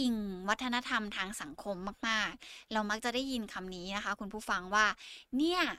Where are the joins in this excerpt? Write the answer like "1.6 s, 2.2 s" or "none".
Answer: none